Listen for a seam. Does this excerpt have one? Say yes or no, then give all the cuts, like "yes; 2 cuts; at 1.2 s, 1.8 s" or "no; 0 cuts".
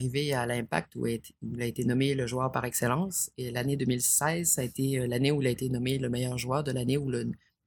no; 0 cuts